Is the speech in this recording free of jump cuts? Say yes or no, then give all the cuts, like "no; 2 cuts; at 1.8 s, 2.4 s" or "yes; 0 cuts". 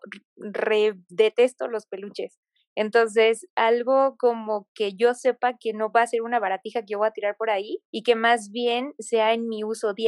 no; 2 cuts; at 2.6 s, 7.9 s